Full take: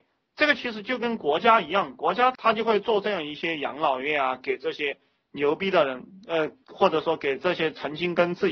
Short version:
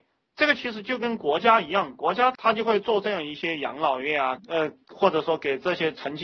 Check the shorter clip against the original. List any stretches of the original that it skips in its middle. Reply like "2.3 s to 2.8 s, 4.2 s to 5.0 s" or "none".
4.4 s to 6.2 s